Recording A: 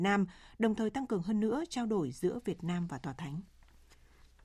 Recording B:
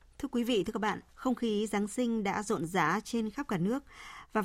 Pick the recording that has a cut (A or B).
B